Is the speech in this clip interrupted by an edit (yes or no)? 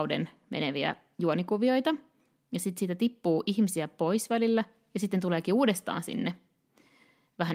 no